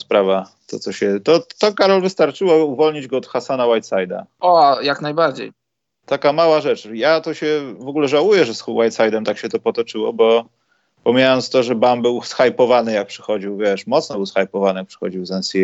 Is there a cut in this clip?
no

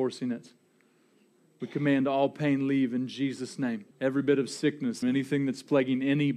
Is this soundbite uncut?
no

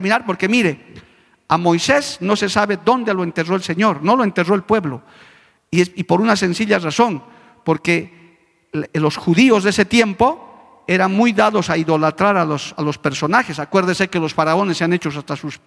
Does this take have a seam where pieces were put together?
no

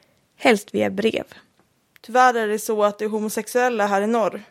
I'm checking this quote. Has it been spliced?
yes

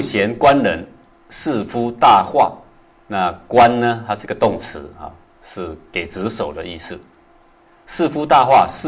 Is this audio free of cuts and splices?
no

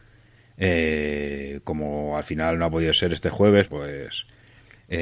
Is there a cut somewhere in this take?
yes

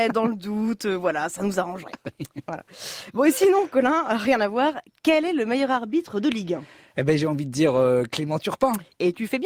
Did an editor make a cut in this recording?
no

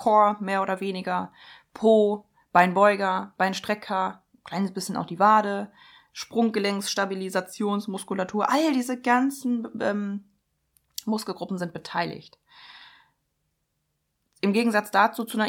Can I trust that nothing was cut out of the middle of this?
yes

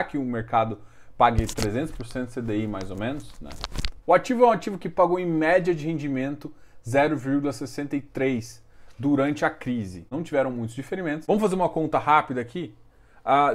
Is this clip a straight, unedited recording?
no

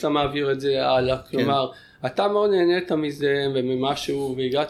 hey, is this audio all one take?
yes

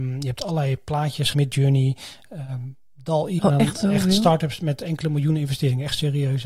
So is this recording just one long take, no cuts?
no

